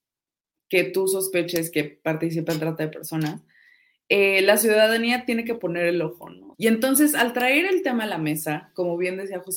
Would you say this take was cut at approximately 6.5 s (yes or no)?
yes